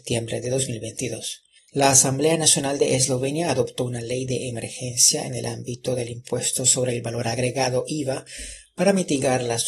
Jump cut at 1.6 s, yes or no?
yes